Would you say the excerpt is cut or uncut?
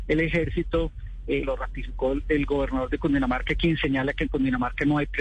cut